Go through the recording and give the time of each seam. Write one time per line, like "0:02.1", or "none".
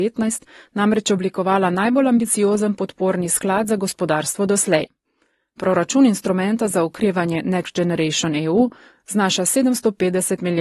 none